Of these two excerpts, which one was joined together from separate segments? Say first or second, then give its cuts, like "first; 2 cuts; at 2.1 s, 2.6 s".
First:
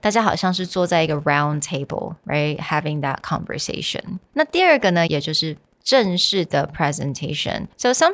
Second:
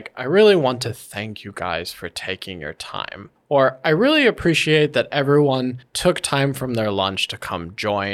first; 1 cut; at 5.1 s